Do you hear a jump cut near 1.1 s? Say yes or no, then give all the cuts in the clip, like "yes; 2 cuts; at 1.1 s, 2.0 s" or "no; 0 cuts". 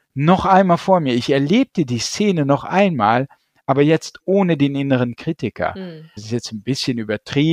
no; 1 cut; at 6.2 s